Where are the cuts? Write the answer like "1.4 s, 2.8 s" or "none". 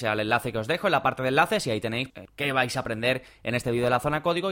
2.1 s